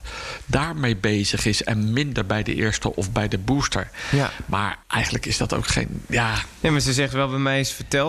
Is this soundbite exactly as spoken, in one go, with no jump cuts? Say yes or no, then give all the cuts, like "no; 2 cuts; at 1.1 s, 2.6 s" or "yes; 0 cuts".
no; 1 cut; at 4.8 s